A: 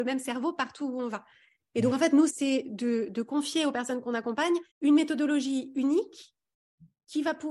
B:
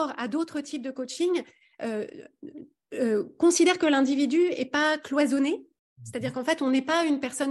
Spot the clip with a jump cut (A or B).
A